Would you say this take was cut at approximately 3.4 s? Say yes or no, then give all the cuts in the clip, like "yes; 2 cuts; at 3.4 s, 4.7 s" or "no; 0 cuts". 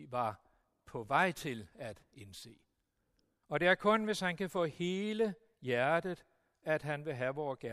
yes; 1 cut; at 3.4 s